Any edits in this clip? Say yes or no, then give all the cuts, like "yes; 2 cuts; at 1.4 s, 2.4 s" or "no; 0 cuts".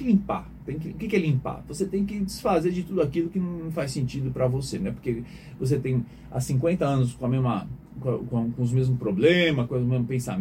no; 0 cuts